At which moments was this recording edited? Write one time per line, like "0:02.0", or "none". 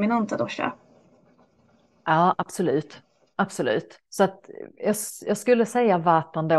0:04.0